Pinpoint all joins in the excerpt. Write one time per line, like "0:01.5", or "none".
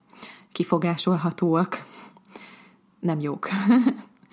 none